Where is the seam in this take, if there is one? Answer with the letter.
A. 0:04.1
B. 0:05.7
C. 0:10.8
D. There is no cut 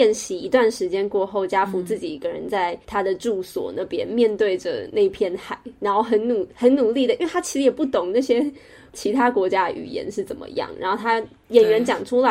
D